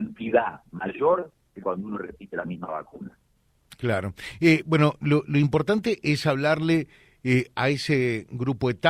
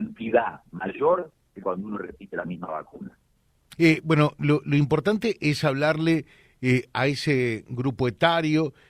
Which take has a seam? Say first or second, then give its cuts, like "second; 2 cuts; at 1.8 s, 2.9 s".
second; 1 cut; at 3.8 s